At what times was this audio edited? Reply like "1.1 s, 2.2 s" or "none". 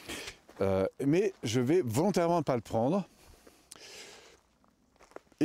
none

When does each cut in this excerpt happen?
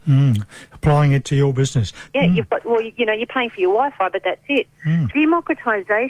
2.1 s, 5.1 s

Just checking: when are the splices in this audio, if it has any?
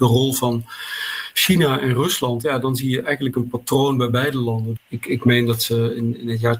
4.8 s

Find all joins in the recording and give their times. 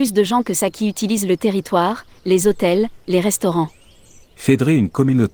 4.2 s

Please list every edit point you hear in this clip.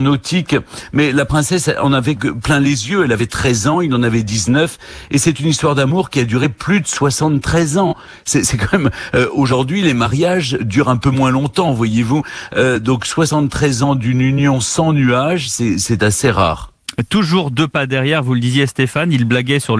2.1 s

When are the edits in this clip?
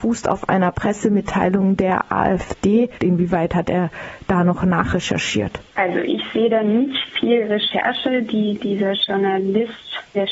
3.0 s

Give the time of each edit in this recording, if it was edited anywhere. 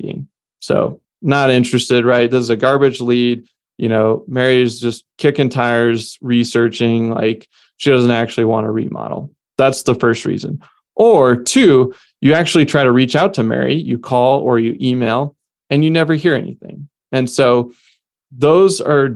1.0 s, 5.1 s

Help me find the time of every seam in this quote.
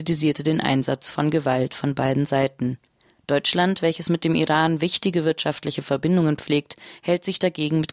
none

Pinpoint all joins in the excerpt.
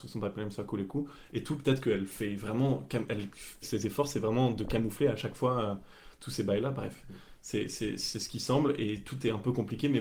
3.6 s

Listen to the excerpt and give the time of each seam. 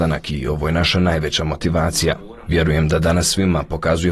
2.5 s

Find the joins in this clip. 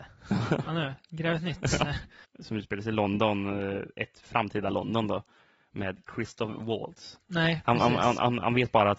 2.2 s, 7.2 s

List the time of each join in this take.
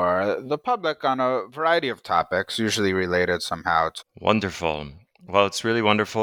4.0 s

